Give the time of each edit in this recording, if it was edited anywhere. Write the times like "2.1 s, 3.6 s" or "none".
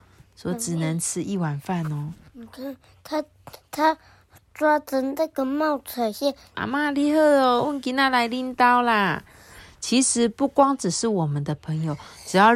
6.5 s